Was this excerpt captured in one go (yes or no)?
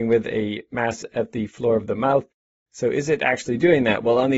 no